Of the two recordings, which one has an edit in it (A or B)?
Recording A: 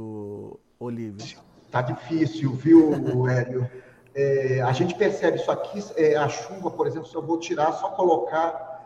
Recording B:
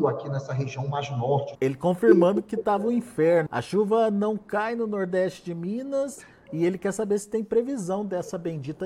B